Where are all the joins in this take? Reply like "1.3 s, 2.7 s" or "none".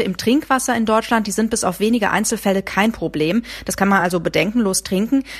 none